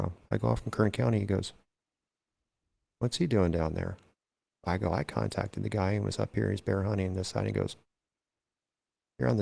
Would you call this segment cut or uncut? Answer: uncut